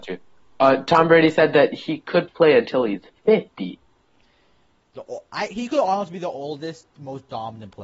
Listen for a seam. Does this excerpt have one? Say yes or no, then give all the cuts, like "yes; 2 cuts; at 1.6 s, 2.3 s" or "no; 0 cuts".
no; 0 cuts